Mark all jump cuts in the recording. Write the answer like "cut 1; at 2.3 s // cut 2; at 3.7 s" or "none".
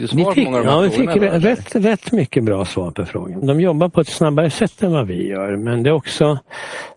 cut 1; at 3.4 s